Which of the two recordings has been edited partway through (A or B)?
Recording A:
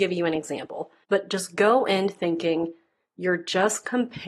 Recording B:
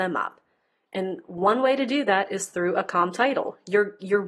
A